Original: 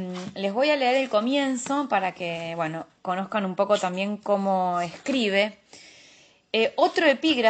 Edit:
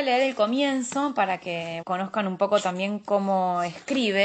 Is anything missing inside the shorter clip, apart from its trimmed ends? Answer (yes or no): yes